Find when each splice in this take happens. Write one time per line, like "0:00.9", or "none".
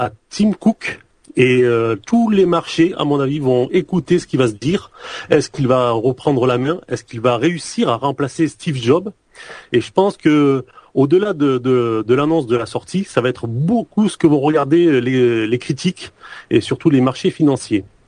none